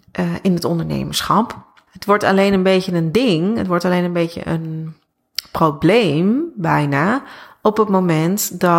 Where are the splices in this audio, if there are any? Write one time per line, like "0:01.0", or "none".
0:01.9